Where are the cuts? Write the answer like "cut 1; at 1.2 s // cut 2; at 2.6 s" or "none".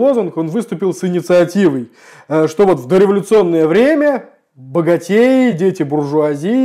none